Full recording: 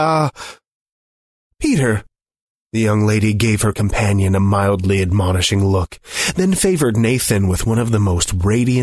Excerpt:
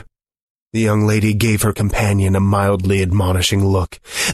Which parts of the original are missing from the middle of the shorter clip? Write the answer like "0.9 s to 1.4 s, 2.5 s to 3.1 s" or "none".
none